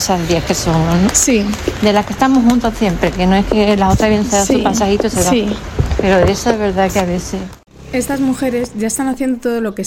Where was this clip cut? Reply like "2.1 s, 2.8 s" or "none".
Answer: none